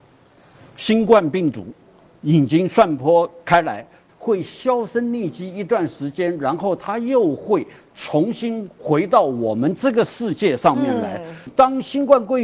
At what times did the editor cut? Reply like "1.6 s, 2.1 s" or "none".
4.1 s, 11.5 s